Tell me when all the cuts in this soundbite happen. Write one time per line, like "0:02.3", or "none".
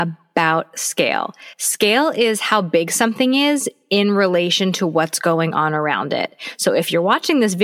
none